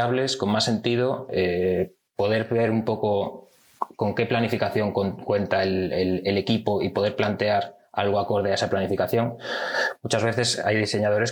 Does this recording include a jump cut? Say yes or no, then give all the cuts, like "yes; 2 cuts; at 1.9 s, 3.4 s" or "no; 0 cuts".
no; 0 cuts